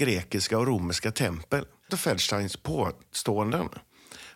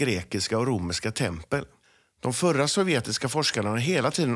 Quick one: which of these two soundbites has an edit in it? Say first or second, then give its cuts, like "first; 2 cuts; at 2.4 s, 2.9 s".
first; 1 cut; at 1.9 s